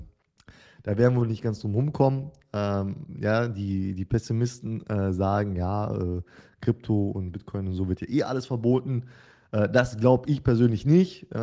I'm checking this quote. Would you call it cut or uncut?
uncut